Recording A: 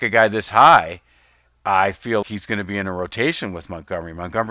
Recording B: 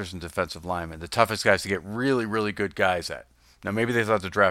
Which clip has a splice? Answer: A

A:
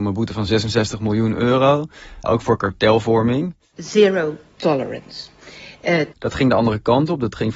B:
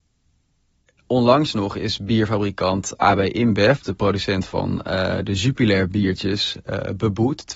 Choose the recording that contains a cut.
A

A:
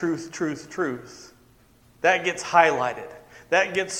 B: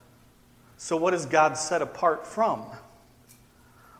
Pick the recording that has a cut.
A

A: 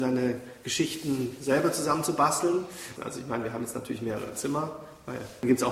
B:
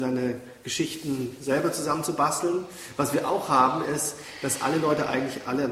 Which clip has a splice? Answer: A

